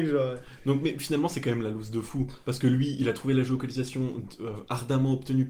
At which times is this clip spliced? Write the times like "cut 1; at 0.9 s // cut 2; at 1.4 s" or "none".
none